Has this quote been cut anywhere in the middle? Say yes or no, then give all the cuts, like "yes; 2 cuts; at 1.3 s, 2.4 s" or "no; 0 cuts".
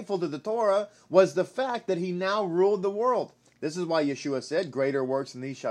yes; 1 cut; at 3.5 s